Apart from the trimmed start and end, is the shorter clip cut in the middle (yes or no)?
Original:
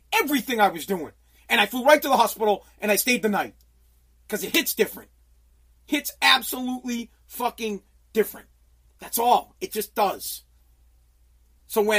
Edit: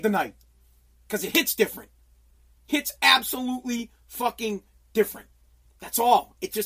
no